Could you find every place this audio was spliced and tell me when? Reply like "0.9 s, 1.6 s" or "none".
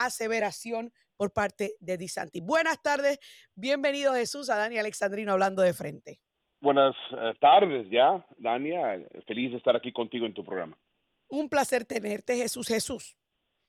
6.6 s